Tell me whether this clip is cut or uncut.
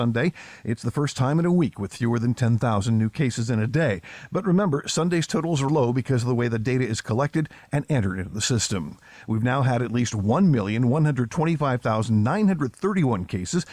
cut